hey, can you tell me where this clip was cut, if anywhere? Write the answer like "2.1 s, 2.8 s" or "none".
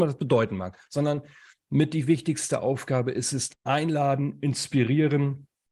3.5 s